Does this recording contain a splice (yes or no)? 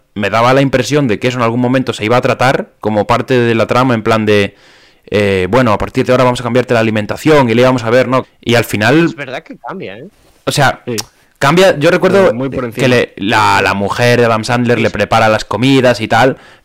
yes